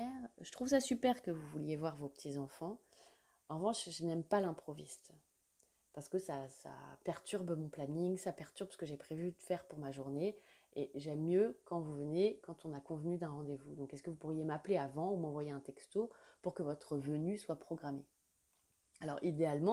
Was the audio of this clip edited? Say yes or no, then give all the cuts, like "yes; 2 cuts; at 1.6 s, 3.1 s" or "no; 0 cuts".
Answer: no; 0 cuts